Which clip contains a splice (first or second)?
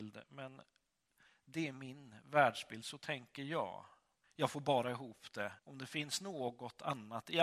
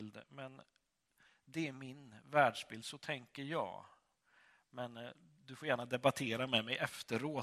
first